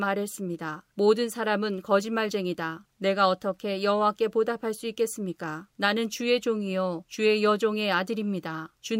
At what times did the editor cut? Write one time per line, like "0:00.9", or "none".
0:02.9
0:05.7